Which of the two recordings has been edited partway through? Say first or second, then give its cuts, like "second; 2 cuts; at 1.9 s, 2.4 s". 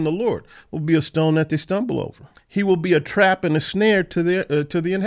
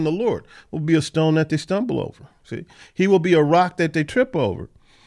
first; 1 cut; at 2.3 s